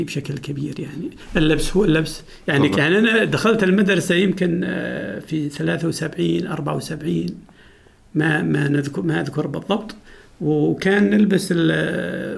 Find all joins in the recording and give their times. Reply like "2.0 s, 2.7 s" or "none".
2.7 s

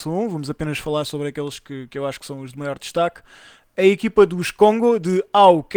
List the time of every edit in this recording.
none

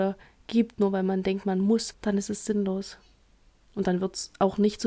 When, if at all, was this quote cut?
1.9 s

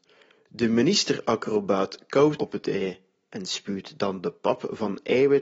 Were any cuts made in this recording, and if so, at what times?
2.4 s

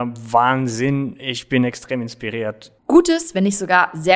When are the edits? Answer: 2.8 s

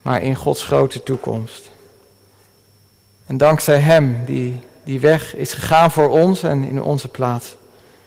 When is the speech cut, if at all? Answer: none

